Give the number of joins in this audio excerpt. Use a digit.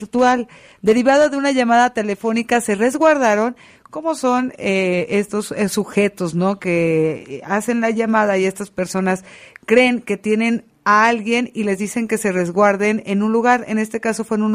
0